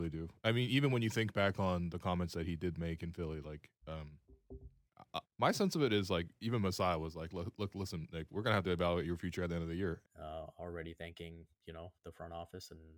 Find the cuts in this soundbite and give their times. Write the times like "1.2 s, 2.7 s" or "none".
5.2 s, 10.0 s